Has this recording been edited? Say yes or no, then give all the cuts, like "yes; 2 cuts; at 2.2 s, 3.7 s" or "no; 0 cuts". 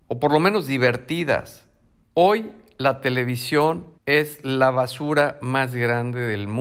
yes; 2 cuts; at 2.0 s, 3.9 s